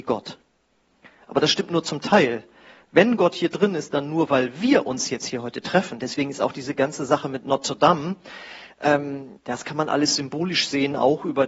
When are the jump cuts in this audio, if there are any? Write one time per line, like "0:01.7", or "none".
none